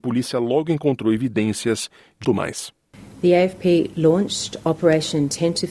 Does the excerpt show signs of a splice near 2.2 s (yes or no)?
yes